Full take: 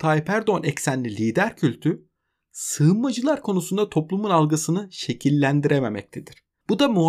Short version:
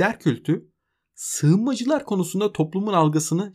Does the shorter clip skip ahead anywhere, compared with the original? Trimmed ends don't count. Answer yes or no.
no